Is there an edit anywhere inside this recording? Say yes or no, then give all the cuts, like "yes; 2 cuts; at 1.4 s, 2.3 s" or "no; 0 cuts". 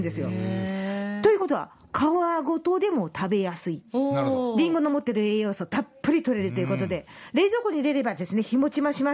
no; 0 cuts